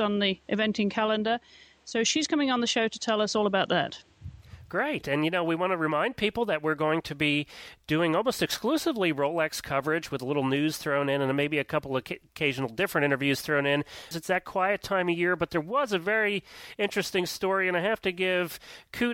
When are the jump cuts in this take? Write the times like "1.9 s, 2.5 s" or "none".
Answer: 14.1 s